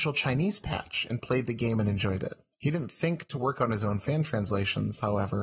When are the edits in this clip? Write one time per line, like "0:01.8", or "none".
0:02.5